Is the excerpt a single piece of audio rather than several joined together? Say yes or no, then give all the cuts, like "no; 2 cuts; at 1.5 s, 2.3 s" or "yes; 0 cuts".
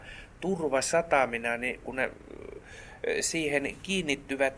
yes; 0 cuts